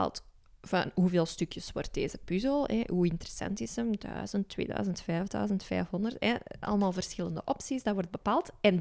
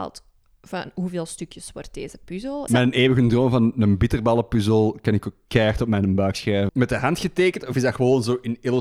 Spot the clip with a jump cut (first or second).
second